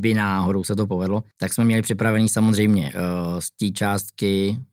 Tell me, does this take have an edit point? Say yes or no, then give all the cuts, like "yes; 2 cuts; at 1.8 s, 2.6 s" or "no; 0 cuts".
yes; 1 cut; at 1.3 s